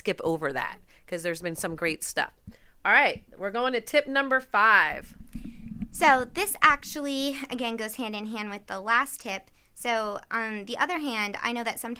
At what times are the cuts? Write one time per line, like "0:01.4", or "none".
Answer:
none